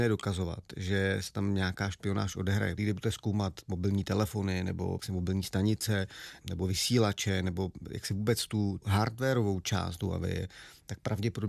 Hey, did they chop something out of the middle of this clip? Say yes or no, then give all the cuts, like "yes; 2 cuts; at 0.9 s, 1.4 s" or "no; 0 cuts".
yes; 1 cut; at 2.8 s